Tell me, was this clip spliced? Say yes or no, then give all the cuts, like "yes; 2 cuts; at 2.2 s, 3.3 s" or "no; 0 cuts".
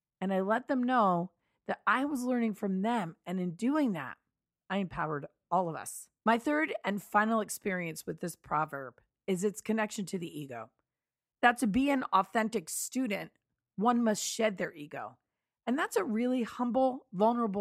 yes; 1 cut; at 6.2 s